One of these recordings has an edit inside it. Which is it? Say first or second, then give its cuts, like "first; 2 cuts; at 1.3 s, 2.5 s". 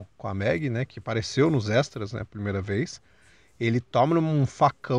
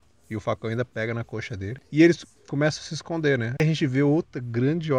second; 1 cut; at 3.6 s